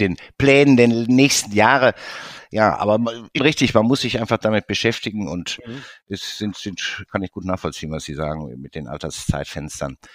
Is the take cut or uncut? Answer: cut